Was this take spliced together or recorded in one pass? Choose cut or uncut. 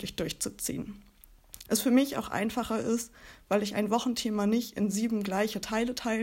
cut